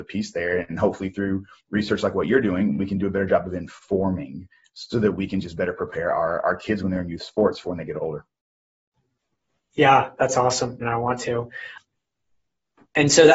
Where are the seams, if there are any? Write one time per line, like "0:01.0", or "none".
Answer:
0:10.8